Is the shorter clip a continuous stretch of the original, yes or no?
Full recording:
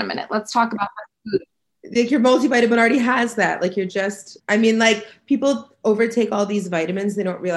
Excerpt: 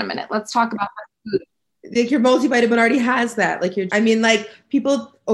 no